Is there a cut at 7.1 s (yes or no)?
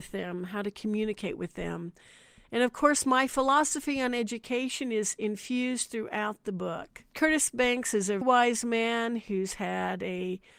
yes